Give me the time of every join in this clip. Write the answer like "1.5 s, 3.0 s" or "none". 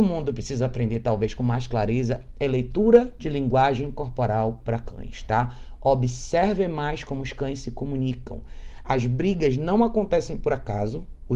none